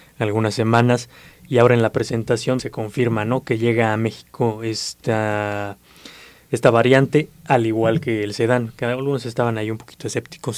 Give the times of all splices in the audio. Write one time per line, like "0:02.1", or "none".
0:02.6